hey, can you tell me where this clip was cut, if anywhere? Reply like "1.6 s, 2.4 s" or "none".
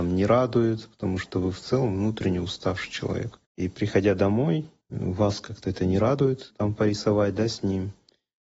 3.4 s, 4.8 s